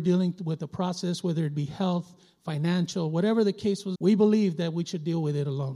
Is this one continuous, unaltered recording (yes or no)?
no